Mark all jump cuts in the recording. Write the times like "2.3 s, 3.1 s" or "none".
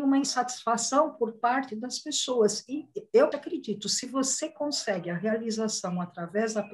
3.3 s